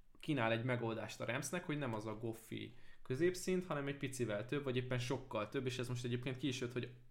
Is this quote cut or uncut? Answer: uncut